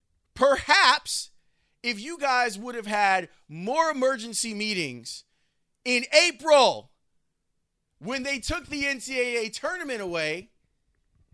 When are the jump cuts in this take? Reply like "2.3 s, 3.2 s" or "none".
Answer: none